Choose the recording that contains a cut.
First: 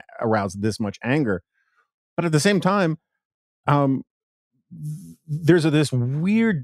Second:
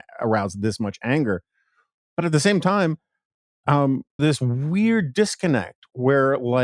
second; 1 cut; at 4.2 s

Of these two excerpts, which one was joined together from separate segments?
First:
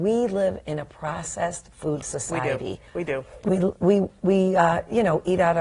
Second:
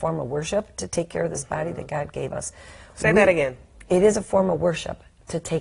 first; 1 cut; at 2.9 s

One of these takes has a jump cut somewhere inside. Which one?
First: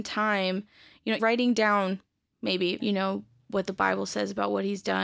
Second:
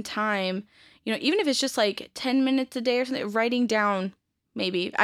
first; 2 cuts; at 1.2 s, 2.8 s

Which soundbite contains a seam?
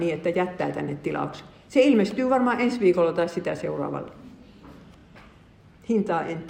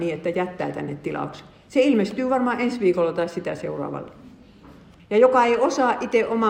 second; 1 cut; at 5.0 s

